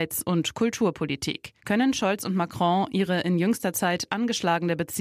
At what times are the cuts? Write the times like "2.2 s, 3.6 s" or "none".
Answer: 1.6 s